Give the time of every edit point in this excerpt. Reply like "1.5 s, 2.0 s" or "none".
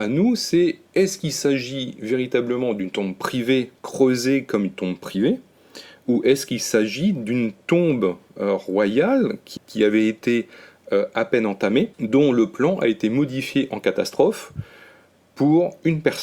3.8 s, 9.6 s, 11.9 s